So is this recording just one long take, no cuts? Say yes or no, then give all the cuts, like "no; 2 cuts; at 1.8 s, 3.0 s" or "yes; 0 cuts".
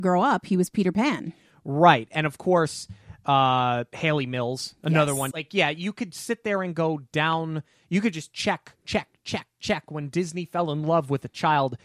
no; 1 cut; at 5.3 s